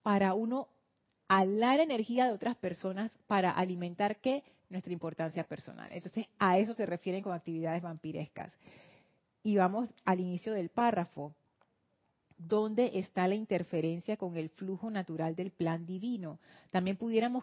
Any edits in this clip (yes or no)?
no